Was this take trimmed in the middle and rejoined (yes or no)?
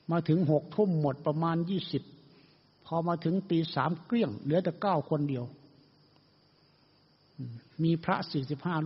yes